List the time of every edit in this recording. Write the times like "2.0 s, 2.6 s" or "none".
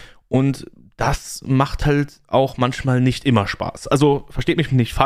none